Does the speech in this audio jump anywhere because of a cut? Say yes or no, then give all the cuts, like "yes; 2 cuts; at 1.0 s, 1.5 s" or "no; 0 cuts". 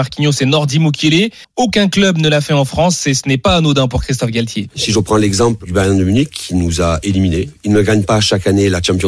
yes; 1 cut; at 1.4 s